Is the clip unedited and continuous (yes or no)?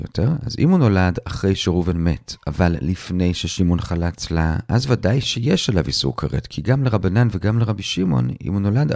yes